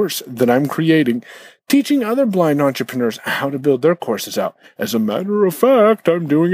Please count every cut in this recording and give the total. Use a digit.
1